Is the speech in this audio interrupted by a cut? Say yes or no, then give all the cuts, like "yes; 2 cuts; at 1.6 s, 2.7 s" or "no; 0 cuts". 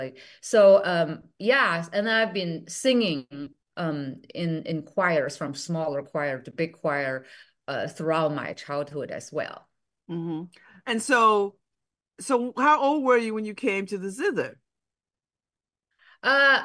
no; 0 cuts